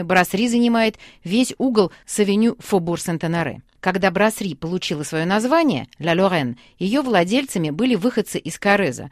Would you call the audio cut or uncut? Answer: uncut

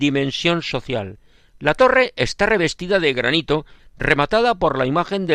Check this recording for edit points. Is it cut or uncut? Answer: cut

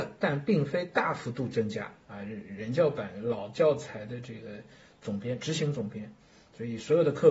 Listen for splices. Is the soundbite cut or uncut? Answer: cut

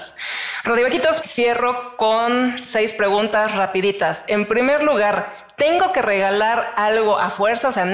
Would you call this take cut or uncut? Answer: cut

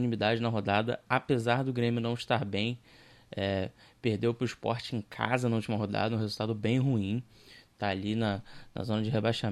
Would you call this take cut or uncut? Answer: uncut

